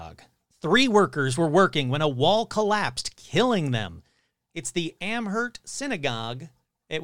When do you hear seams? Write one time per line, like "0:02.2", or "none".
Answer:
0:04.3